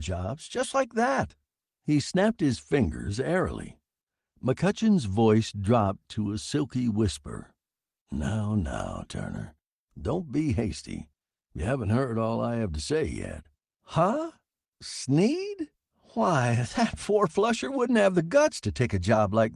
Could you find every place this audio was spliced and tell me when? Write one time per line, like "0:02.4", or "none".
0:13.7